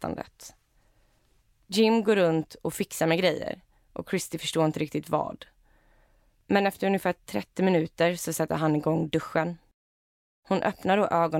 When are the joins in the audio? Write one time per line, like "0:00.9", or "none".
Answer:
none